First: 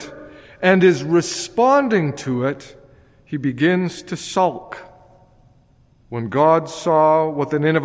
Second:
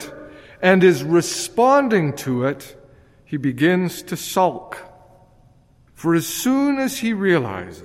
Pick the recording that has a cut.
second; 1 cut; at 5.9 s

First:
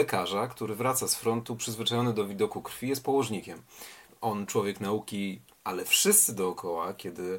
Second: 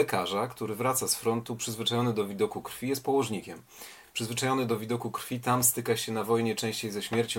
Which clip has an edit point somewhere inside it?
first; 2 cuts; at 4.1 s, 5.5 s

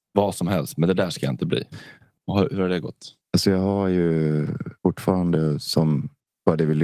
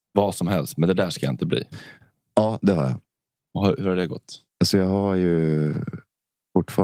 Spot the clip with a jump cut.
first; 2 cuts; at 2.2 s, 4.8 s

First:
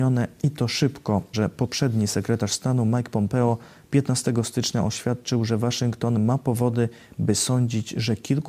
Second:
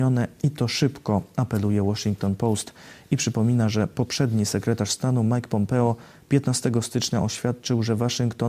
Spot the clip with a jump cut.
first; 1 cut; at 1.3 s

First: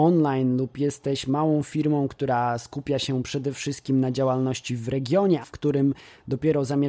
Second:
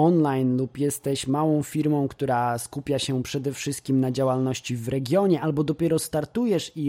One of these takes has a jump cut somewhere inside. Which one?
first; 1 cut; at 5.4 s

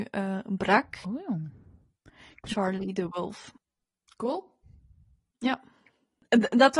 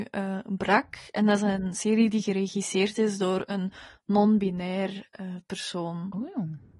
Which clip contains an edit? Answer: first; 1 cut; at 1.0 s

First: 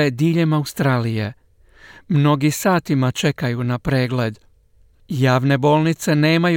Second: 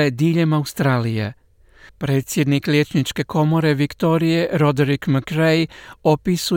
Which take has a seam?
second; 1 cut; at 1.9 s

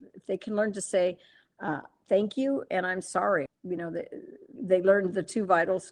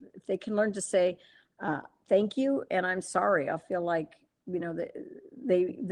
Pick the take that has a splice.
first; 2 cuts; at 3.5 s, 4.6 s

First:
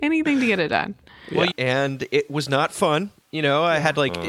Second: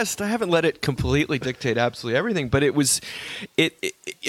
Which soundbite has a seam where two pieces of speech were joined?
first; 1 cut; at 1.5 s

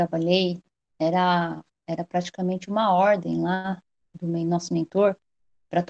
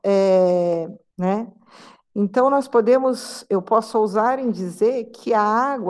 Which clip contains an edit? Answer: second; 1 cut; at 1.1 s

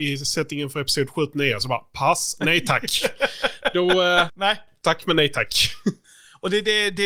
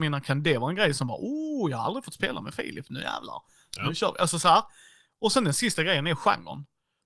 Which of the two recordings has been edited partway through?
first; 1 cut; at 4.3 s

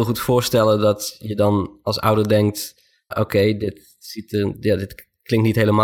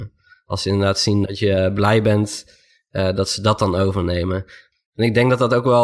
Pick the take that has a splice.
first; 1 cut; at 3.1 s

